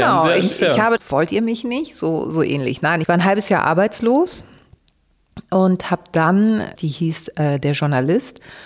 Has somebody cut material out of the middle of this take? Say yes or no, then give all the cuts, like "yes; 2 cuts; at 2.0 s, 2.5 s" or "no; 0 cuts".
yes; 2 cuts; at 1.0 s, 6.8 s